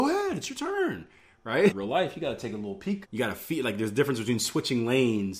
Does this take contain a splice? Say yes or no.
yes